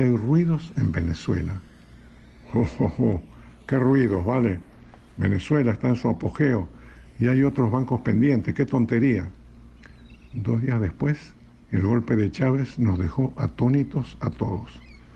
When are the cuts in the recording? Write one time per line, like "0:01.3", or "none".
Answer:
none